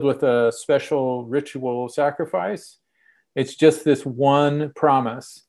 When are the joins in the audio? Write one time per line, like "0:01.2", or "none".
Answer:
0:03.2